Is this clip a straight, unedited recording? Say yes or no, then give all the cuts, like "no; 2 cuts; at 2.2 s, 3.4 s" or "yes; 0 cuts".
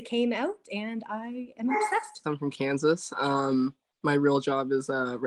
no; 1 cut; at 2.2 s